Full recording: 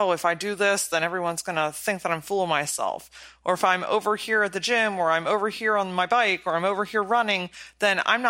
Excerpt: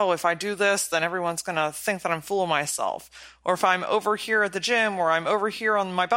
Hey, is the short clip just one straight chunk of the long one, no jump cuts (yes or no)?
yes